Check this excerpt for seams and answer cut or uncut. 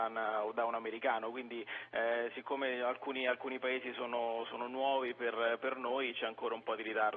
uncut